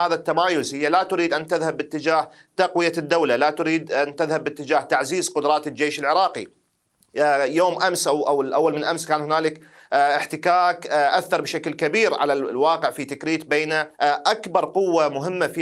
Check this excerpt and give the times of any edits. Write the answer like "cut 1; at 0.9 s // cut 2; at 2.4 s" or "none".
cut 1; at 13.9 s